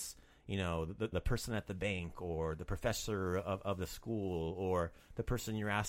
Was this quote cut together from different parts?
yes; 1 cut; at 1.1 s

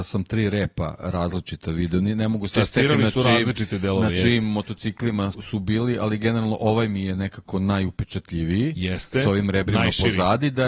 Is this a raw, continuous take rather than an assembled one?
no; 1 cut; at 5.3 s

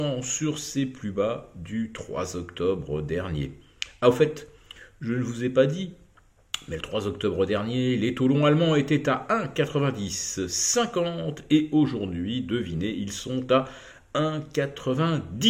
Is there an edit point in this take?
no; 0 cuts

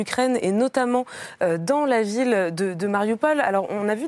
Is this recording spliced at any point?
no; 0 cuts

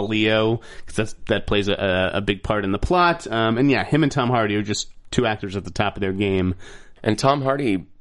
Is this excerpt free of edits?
no; 1 cut; at 7.0 s

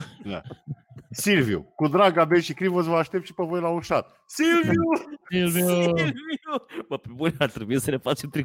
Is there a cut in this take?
no; 0 cuts

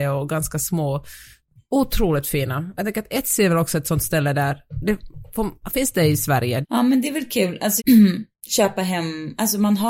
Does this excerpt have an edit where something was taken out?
yes; 2 cuts; at 6.6 s, 7.8 s

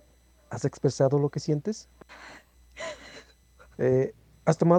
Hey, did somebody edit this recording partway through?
yes; 1 cut; at 3.7 s

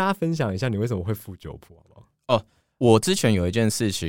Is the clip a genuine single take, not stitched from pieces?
no; 1 cut; at 2.8 s

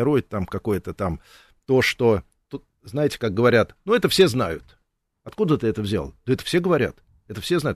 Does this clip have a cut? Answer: no; 0 cuts

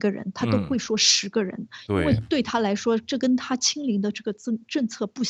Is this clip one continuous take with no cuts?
yes; 0 cuts

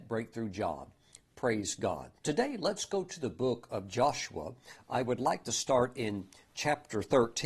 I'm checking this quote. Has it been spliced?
yes; 1 cut; at 2.2 s

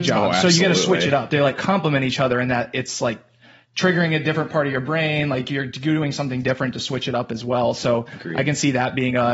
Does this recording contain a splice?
yes; 1 cut; at 1.3 s

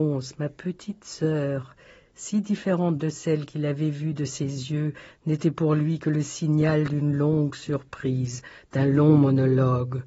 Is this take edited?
no; 0 cuts

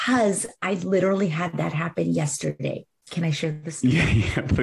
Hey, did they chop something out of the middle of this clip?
no; 0 cuts

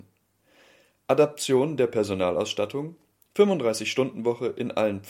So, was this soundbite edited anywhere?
no; 0 cuts

